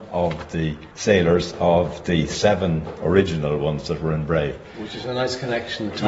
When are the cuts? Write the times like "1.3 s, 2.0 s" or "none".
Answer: 0.9 s